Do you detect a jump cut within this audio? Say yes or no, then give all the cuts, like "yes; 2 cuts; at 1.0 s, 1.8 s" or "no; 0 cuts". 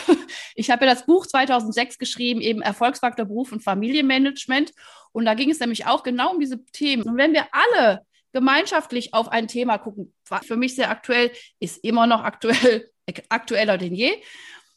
yes; 2 cuts; at 7.0 s, 10.4 s